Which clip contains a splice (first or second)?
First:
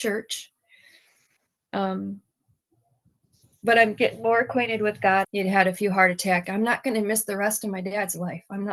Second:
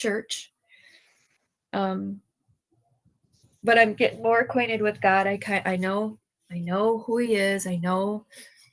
first